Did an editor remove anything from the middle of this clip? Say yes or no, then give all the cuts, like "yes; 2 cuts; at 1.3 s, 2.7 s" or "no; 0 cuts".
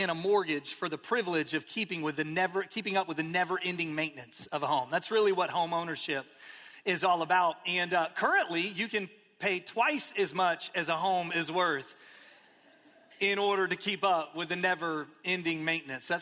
no; 0 cuts